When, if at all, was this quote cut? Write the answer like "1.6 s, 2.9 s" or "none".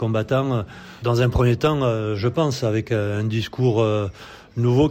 1.0 s